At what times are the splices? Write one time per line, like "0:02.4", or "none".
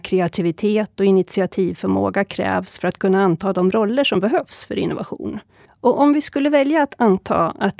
0:05.6